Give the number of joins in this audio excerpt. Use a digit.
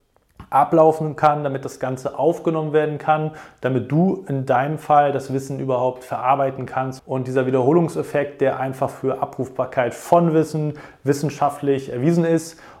1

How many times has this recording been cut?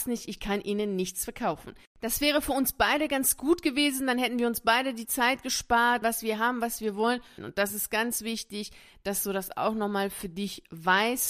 2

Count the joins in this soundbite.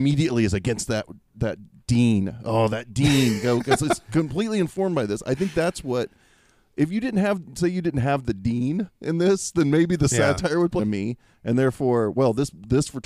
1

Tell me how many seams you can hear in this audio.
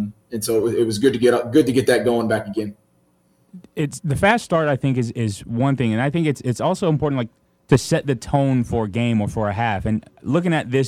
0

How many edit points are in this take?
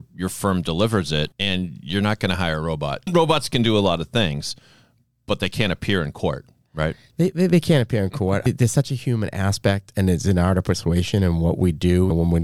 0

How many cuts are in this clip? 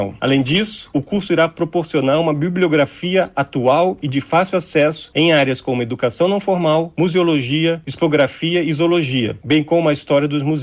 0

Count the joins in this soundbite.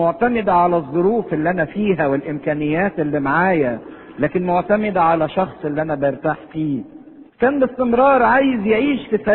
1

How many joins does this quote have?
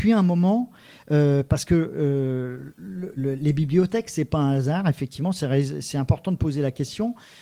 1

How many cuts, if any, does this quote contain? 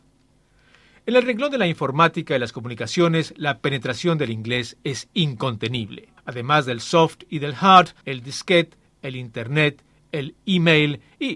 2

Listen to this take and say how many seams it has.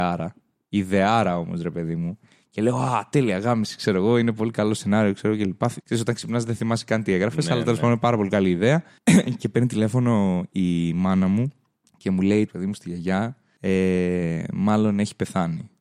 2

